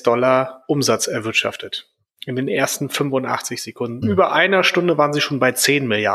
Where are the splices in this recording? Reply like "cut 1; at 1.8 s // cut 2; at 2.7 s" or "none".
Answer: cut 1; at 4.0 s